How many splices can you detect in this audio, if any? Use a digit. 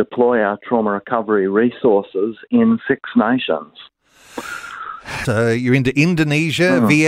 1